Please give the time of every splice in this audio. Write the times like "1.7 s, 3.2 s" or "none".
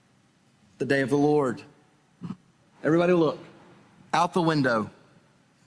2.6 s